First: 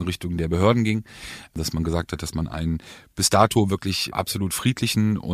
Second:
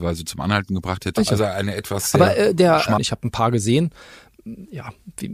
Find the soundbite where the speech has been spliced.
second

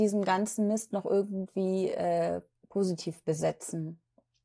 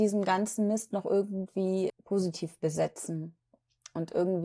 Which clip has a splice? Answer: second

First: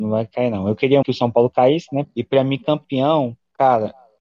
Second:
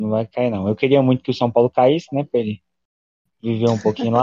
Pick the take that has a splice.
first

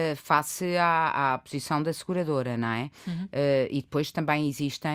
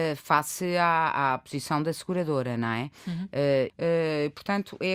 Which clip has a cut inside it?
second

